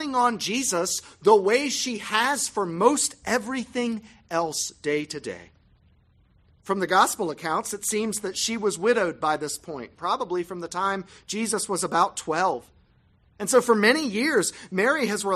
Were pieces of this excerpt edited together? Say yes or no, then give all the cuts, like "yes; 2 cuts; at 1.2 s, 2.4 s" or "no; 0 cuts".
no; 0 cuts